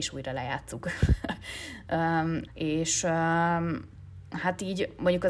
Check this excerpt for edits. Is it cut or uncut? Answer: cut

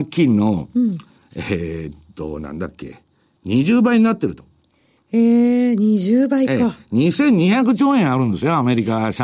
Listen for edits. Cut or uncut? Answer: uncut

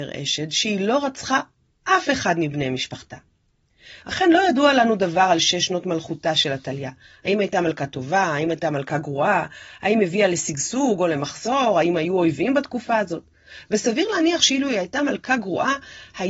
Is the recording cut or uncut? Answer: uncut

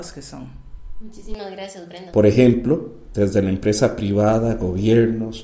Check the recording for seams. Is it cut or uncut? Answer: cut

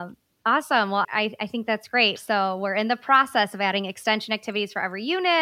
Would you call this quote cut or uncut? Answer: cut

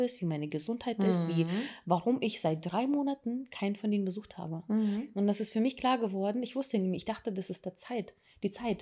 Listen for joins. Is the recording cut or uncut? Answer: uncut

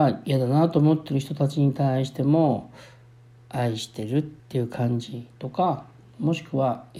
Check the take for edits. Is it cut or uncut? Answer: cut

